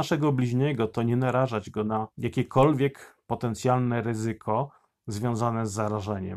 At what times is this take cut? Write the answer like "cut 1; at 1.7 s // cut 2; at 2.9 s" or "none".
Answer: cut 1; at 2.1 s